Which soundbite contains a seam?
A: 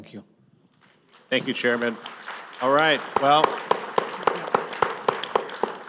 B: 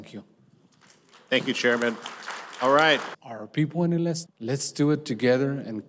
B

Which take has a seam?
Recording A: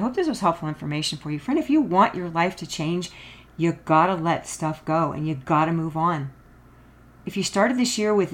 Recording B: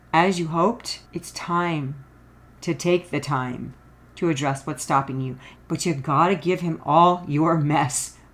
B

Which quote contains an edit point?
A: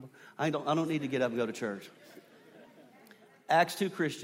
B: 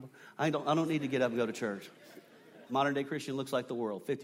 B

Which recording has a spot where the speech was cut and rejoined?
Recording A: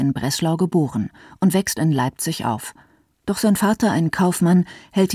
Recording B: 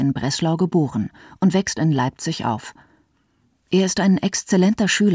A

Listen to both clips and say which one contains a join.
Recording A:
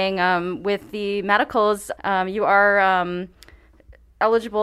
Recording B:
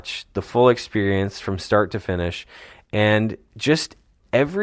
A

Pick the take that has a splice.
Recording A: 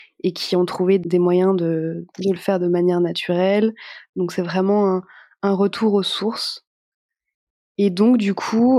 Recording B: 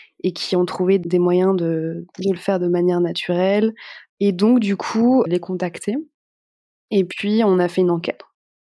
B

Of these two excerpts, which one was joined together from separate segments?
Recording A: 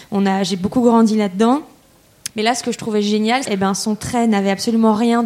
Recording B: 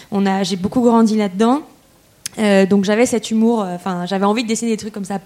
A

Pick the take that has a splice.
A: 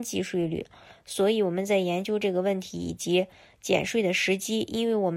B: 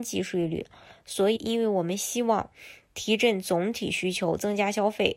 B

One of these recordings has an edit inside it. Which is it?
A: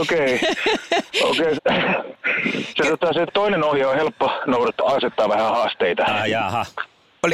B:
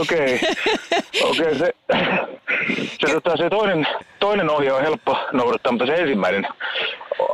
A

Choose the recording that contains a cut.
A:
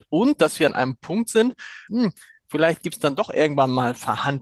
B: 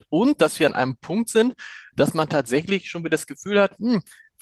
A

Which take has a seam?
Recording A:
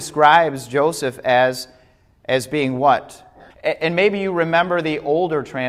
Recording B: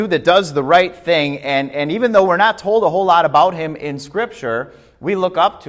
A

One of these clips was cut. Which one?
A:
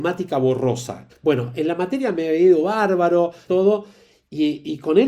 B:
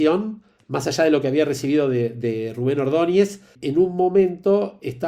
A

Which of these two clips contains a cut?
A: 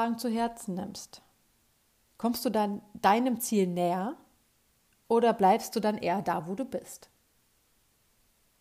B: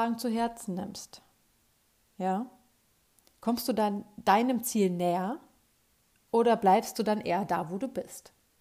A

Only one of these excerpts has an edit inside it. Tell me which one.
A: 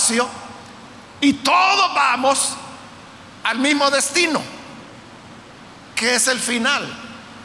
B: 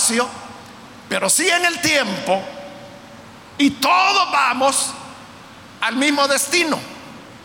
A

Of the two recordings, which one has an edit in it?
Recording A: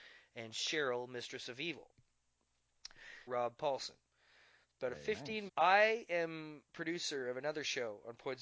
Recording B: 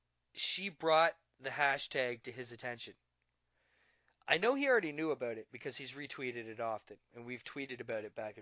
A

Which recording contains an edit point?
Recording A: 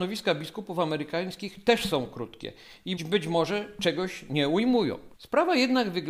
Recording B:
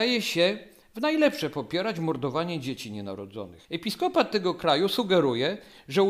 A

